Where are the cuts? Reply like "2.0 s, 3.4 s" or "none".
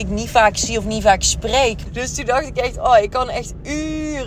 1.9 s

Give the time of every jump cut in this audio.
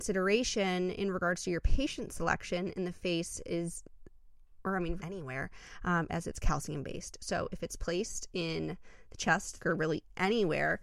5.0 s, 6.1 s, 9.6 s

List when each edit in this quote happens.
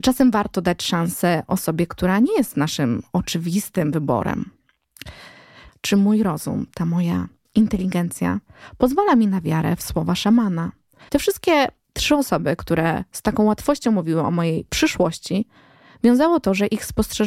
5.7 s, 11.1 s

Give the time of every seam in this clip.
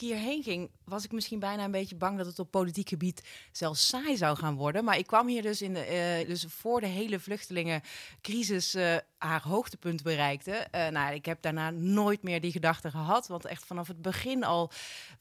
6.2 s

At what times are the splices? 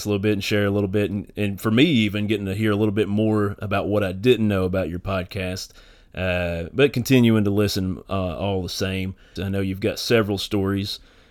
9.4 s

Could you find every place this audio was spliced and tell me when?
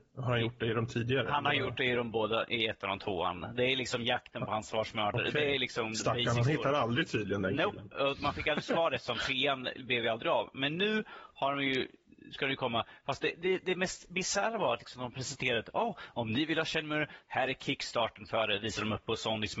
none

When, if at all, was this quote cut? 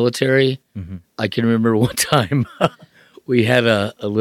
1.1 s

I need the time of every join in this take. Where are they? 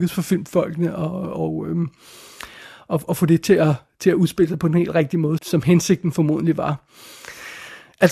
5.4 s

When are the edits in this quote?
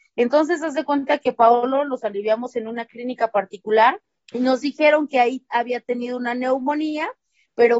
4.2 s

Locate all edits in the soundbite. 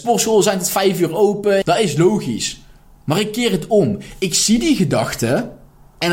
1.6 s

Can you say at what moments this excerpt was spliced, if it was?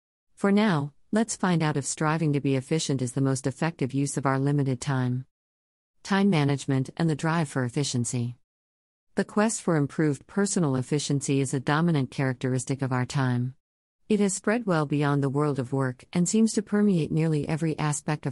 none

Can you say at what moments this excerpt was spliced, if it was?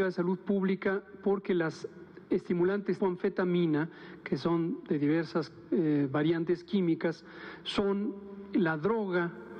3.0 s

